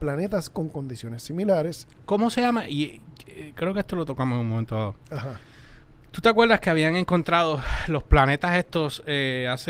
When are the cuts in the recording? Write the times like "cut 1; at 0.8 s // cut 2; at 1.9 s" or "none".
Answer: none